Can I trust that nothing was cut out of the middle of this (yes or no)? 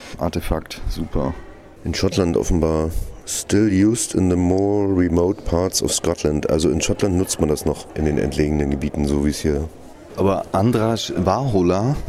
no